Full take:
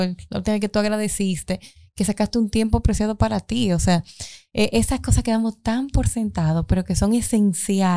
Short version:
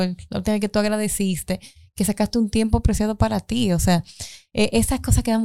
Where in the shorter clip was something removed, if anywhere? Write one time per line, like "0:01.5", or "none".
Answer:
none